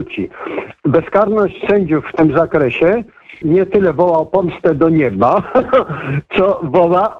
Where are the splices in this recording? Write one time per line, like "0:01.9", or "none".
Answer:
0:03.4